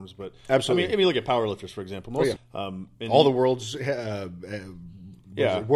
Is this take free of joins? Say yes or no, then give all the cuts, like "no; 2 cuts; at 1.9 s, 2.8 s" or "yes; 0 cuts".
no; 1 cut; at 2.4 s